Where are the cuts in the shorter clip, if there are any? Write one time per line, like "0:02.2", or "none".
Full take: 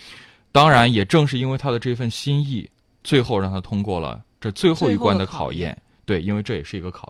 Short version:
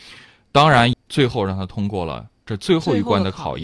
0:00.9